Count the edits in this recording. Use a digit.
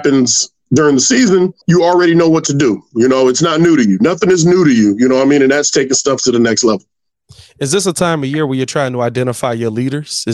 1